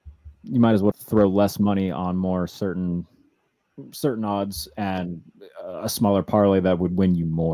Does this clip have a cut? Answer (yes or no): yes